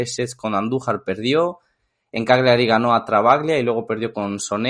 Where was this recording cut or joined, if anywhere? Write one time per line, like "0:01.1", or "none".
none